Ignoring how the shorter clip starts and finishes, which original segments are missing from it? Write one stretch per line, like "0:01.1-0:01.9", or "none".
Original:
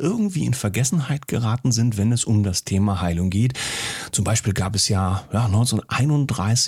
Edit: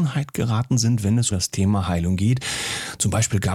0:02.2-0:02.4